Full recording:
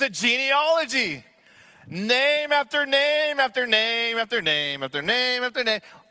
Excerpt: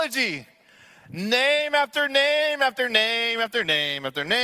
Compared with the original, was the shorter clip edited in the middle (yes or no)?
no